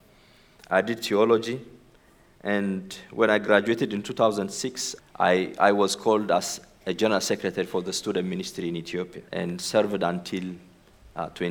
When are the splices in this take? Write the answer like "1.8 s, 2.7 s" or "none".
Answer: 5.0 s, 9.3 s